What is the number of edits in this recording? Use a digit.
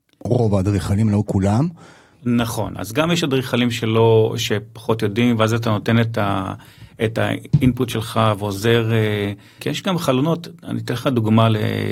2